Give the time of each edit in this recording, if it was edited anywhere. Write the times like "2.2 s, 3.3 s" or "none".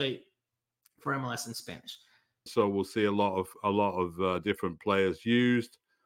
2.5 s